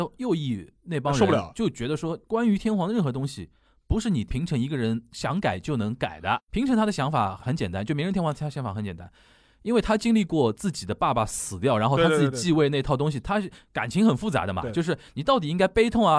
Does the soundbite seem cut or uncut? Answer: uncut